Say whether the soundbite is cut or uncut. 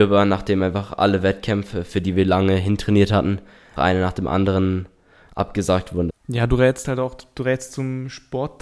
cut